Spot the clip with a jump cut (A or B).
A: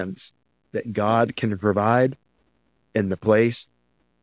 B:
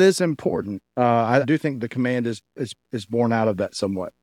B